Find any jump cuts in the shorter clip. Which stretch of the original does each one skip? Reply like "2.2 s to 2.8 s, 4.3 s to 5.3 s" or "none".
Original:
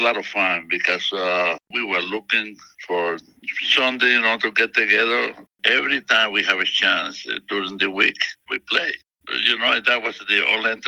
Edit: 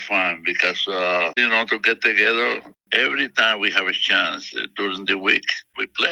1.6 s to 4.1 s